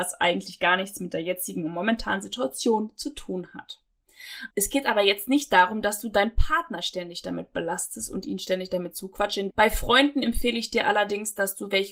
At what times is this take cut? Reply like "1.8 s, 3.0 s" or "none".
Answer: 4.5 s, 9.5 s